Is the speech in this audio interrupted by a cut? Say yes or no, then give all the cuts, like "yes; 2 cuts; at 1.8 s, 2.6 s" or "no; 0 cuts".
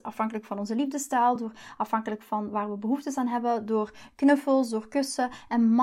no; 0 cuts